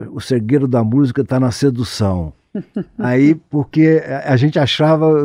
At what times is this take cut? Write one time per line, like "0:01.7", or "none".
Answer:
none